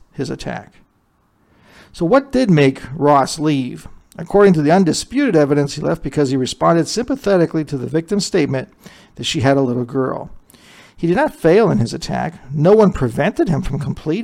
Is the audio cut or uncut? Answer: uncut